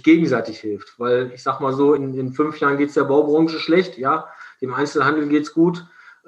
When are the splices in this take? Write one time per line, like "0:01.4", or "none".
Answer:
none

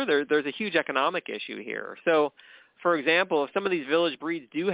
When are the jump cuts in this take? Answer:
none

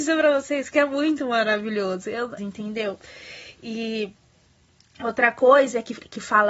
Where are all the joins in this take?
0:02.4

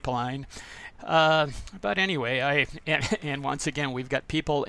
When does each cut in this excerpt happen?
0:00.9

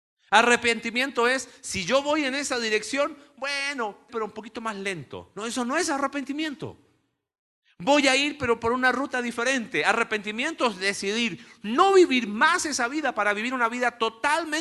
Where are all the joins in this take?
0:04.1

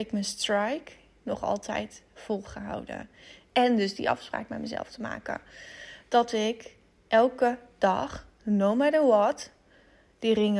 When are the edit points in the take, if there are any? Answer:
0:03.5

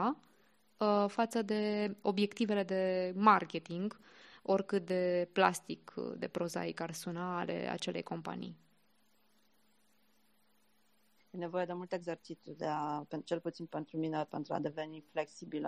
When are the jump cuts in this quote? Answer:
0:11.2

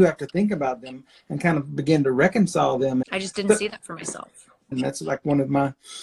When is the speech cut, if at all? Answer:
0:03.0
0:04.7

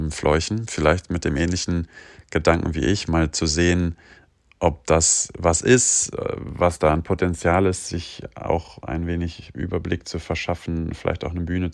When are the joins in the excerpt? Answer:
none

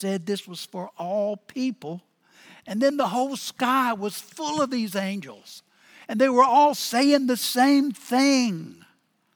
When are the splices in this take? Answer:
none

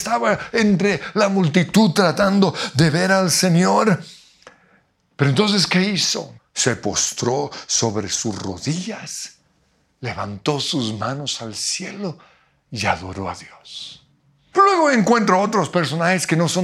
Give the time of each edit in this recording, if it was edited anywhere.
0:06.4
0:14.5

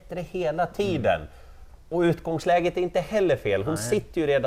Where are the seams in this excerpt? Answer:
0:01.8

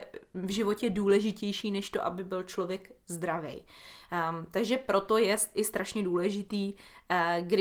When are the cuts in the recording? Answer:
none

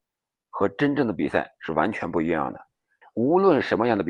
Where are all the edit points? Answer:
0:03.0

